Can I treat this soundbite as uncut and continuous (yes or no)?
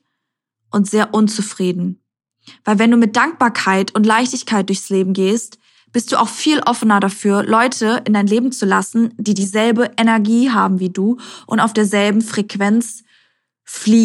yes